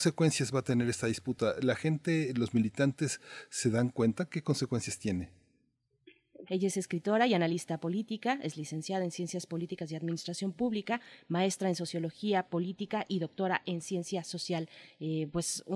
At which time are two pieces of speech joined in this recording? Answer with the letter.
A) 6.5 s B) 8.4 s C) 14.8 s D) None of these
A